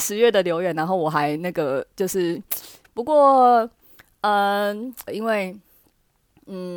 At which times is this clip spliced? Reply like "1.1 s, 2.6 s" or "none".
2.8 s, 5.1 s